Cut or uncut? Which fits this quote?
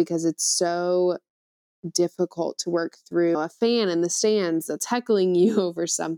cut